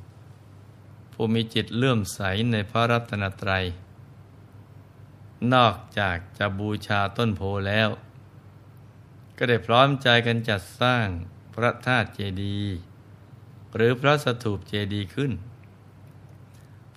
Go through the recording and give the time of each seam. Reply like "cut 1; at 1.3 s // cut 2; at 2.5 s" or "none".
none